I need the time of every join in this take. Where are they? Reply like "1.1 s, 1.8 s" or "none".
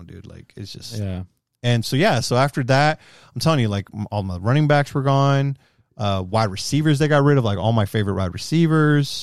1.8 s